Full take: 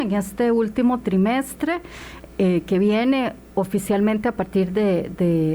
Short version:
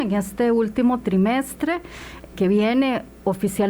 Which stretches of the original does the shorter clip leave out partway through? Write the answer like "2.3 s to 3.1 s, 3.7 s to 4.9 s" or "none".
2.3 s to 2.6 s